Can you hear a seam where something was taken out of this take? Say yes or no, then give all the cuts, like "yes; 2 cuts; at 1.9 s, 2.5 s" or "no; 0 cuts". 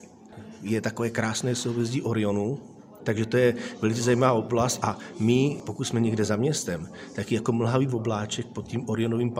yes; 1 cut; at 3.0 s